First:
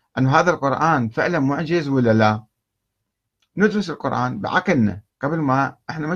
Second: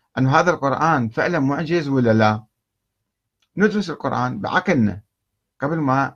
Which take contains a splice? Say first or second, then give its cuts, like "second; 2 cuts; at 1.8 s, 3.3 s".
first; 1 cut; at 5.1 s